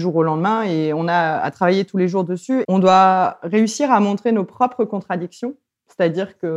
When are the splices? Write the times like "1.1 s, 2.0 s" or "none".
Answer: 2.6 s